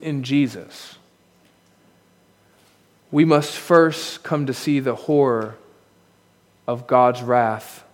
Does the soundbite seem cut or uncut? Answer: uncut